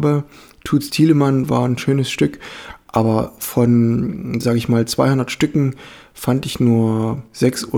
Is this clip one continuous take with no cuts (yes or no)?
yes